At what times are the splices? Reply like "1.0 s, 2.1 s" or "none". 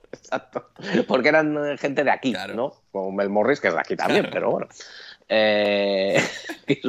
none